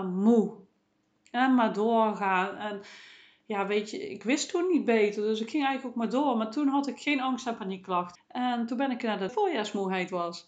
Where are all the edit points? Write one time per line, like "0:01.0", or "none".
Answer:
0:08.2
0:09.3